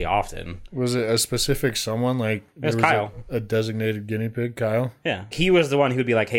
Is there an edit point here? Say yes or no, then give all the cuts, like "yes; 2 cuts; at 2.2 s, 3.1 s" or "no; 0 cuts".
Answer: yes; 1 cut; at 5.3 s